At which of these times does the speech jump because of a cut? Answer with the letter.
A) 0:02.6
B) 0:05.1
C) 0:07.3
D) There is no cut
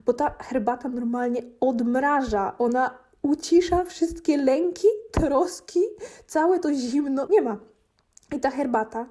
C